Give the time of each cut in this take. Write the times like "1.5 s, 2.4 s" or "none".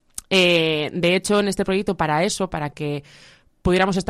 none